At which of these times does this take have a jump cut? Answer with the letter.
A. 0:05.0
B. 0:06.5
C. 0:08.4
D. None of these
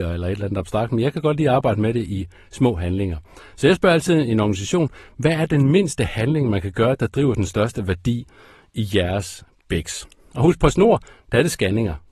D